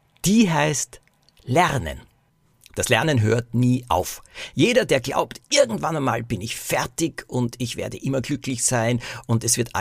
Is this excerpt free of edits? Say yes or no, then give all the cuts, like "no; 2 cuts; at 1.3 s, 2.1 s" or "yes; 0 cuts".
yes; 0 cuts